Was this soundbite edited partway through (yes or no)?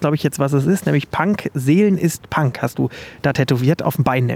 no